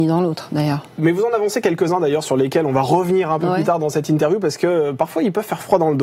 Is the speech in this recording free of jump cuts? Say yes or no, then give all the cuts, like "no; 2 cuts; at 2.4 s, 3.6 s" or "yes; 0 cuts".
yes; 0 cuts